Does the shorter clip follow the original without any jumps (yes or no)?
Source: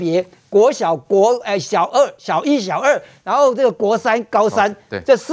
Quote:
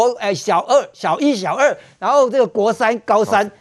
yes